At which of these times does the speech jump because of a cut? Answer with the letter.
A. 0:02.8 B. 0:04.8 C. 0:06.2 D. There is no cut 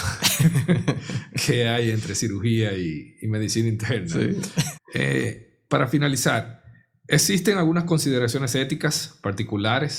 B